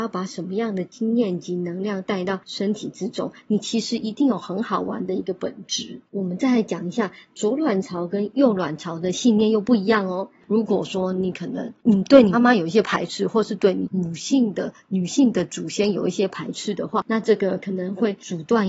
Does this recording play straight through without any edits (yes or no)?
no